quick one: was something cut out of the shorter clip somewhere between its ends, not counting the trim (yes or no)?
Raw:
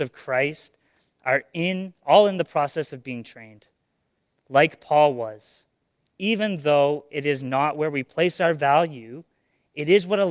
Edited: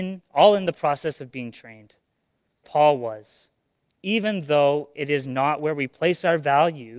yes